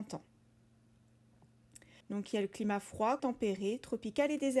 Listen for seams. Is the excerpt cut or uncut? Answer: cut